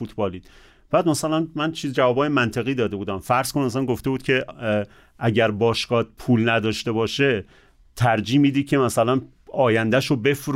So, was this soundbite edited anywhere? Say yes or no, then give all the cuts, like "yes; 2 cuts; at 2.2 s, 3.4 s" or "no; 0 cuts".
no; 0 cuts